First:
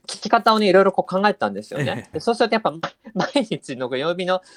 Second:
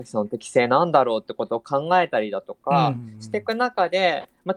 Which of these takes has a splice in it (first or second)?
first